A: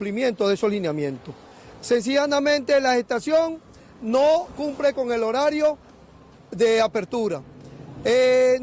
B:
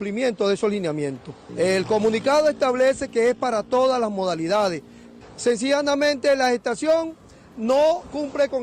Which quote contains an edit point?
B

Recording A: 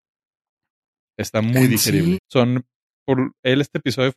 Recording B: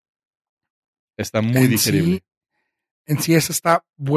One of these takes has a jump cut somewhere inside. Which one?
A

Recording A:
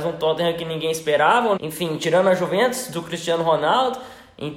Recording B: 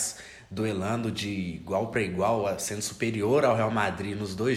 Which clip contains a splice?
A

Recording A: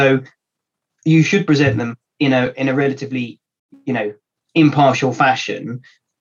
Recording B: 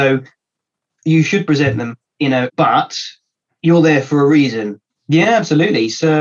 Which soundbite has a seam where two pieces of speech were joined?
B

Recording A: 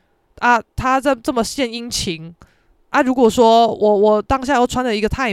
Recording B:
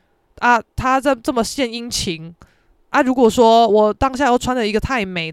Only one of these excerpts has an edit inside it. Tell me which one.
B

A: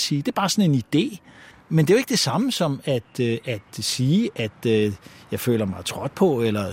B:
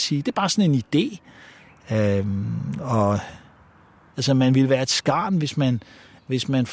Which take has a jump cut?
A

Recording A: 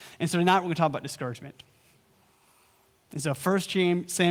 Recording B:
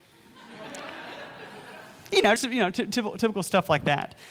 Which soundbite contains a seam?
B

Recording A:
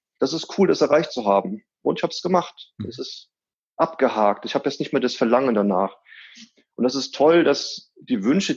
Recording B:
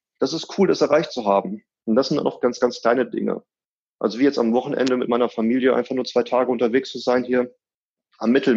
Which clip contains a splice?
B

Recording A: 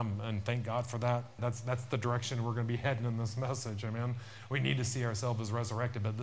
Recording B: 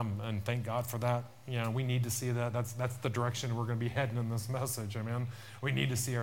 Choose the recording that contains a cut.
A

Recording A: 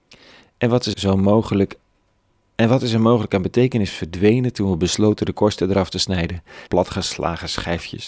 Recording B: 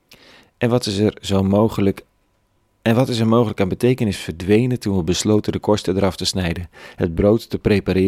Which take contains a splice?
A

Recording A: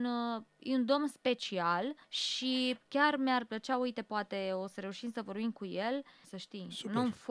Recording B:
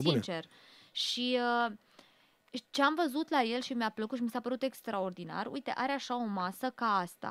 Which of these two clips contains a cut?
A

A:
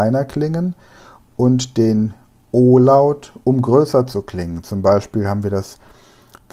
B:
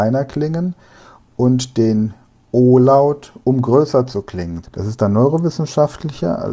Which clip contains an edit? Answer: B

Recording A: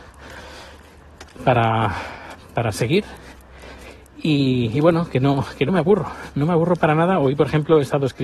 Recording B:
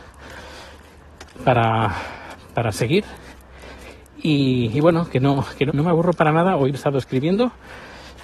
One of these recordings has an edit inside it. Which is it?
B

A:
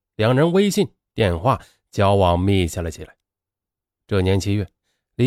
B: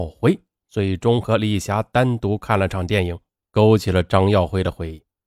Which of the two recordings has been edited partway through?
B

